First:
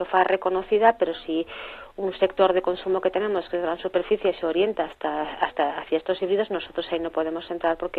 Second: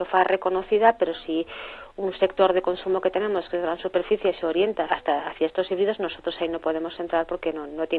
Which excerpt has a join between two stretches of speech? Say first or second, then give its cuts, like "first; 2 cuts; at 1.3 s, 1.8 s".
second; 1 cut; at 4.9 s